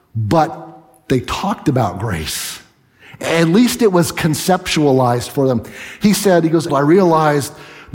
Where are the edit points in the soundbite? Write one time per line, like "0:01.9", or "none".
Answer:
0:06.7